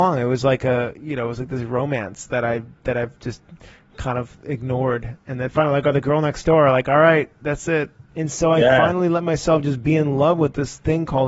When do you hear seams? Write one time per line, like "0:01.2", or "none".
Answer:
0:08.1